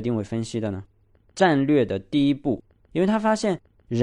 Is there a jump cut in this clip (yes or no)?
yes